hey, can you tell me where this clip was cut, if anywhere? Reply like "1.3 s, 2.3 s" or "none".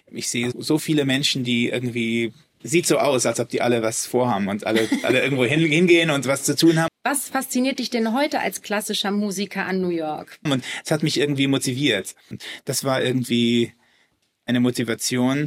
6.9 s, 10.5 s, 12.3 s